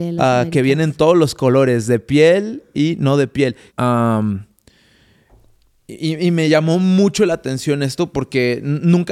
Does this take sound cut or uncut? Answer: cut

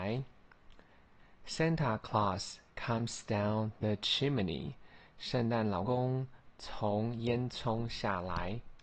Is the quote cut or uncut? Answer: cut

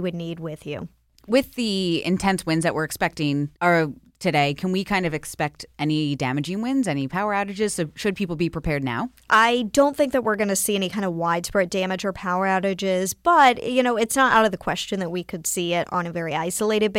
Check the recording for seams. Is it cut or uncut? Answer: cut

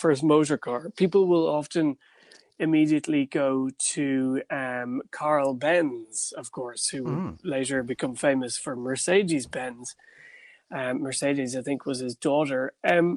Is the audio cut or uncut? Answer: uncut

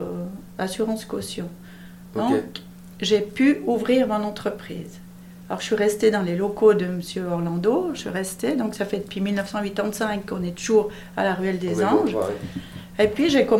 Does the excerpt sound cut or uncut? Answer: uncut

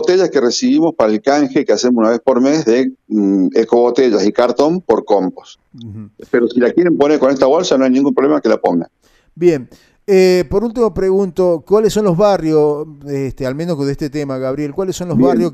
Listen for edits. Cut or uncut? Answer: uncut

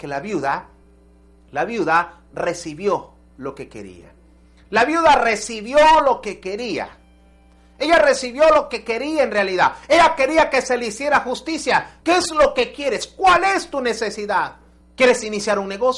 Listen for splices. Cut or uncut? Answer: cut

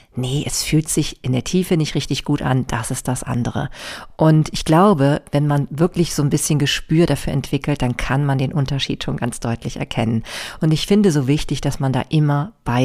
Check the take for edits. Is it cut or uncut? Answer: uncut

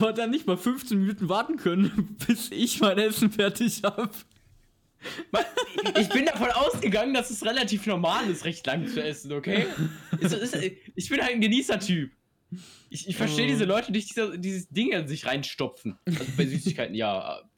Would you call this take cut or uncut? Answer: uncut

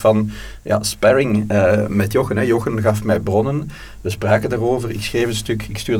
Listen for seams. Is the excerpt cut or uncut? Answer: uncut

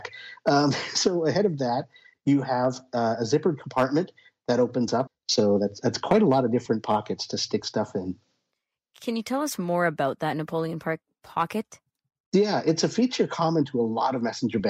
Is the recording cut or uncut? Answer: cut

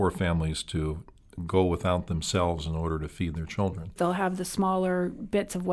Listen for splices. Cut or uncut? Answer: cut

